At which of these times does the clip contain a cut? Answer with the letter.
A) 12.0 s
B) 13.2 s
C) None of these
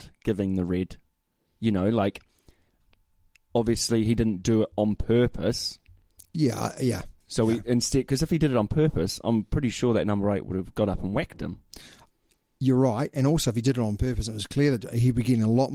C